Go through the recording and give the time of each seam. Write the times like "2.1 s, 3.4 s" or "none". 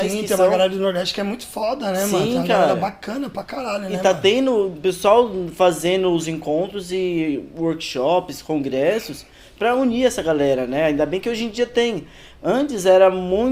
none